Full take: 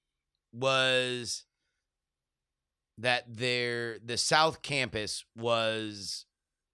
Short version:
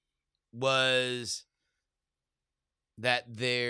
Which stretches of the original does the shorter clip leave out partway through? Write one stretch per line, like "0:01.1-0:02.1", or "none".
none